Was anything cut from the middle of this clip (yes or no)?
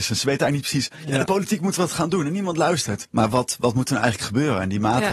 yes